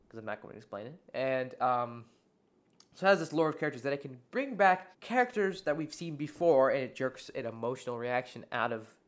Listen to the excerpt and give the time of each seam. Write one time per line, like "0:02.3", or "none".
0:04.9